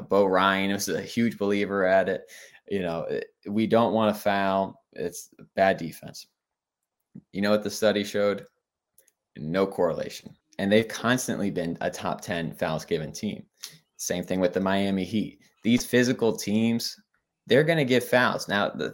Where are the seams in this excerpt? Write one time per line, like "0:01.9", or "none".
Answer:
0:10.4